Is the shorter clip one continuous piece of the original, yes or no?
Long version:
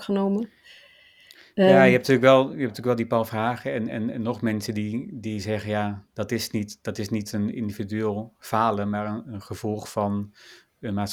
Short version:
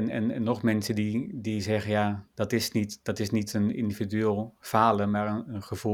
yes